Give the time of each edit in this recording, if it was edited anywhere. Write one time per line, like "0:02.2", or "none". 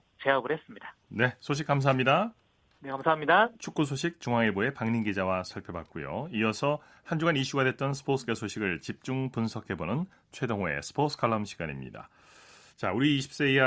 none